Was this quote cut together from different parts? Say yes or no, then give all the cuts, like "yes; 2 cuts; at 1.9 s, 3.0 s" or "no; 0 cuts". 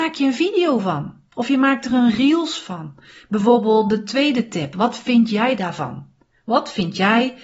yes; 1 cut; at 3.2 s